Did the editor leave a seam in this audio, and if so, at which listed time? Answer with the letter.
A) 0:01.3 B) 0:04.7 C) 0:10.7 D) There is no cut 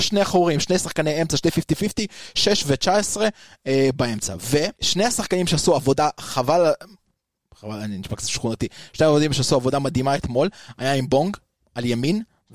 B